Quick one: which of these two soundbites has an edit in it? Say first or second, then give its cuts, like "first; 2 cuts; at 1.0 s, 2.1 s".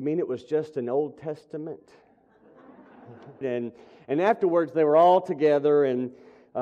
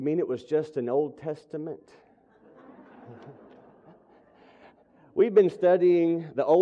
first; 1 cut; at 3.4 s